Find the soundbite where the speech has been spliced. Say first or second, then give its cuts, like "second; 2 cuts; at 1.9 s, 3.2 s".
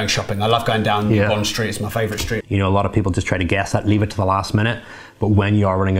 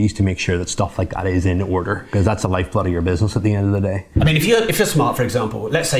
first; 1 cut; at 2.4 s